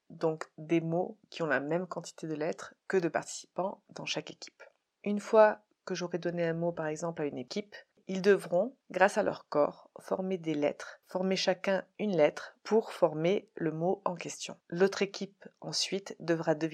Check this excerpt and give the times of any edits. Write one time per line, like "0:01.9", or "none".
none

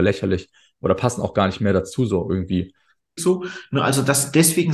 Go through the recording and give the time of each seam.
0:03.2

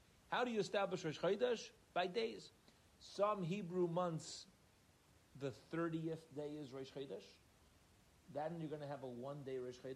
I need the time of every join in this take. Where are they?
none

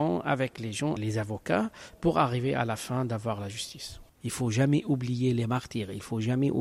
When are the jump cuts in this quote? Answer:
0:01.0
0:04.1

